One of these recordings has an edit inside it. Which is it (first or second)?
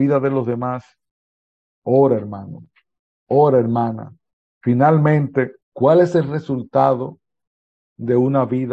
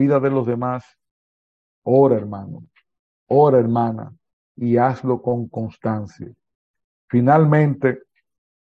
first